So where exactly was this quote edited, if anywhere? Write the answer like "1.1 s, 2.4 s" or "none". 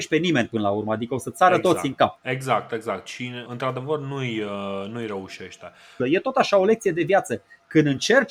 2.2 s, 3.5 s, 6.0 s